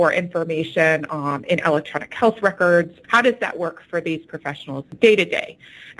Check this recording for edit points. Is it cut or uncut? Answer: cut